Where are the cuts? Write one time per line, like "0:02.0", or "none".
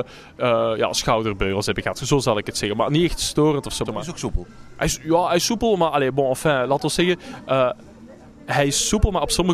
0:03.9